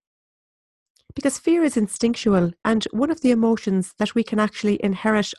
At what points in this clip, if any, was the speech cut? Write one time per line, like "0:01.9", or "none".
0:01.1
0:02.6